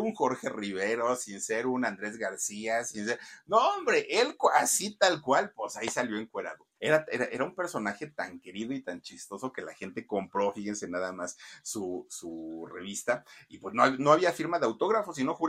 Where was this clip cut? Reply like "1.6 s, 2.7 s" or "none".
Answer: 6.8 s